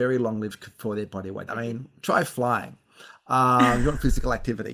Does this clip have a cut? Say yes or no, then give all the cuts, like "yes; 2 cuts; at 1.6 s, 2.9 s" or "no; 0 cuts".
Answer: yes; 1 cut; at 1.5 s